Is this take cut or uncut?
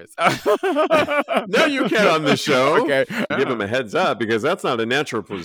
cut